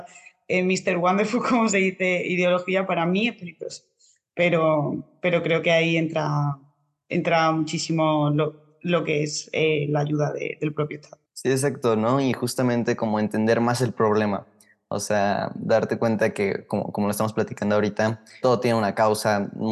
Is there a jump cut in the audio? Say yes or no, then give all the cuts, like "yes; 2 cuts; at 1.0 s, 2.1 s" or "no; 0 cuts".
yes; 2 cuts; at 11.2 s, 18.4 s